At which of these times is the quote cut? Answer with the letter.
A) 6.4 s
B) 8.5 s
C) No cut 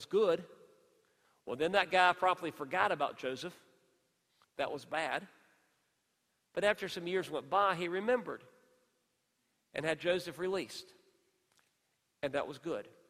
C